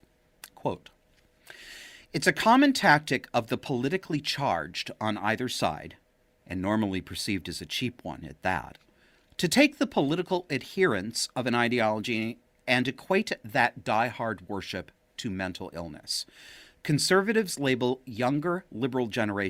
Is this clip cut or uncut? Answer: uncut